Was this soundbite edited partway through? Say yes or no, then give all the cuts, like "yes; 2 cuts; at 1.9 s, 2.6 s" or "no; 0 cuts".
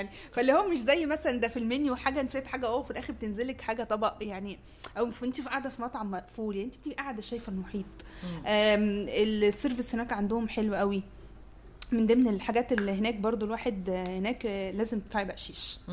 no; 0 cuts